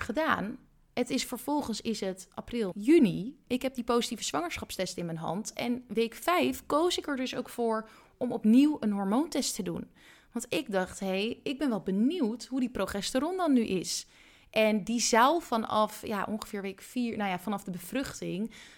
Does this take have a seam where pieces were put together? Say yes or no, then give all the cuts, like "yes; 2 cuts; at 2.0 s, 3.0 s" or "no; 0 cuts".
yes; 1 cut; at 2.7 s